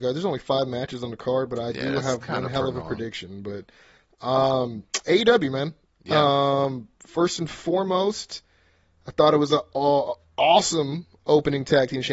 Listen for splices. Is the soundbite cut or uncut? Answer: uncut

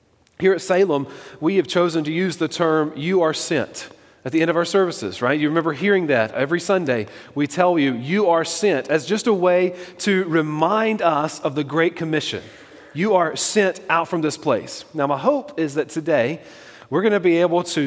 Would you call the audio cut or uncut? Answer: uncut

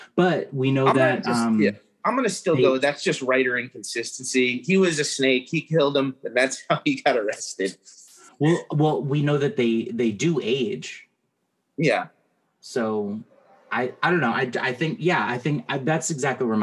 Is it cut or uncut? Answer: uncut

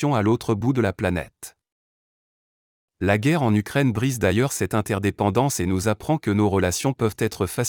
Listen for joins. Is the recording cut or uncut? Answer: uncut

